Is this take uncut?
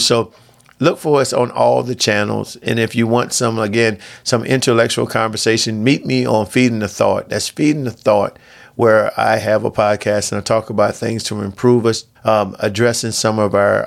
no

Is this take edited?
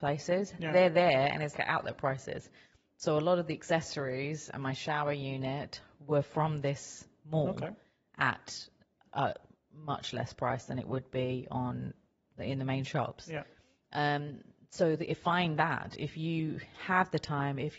yes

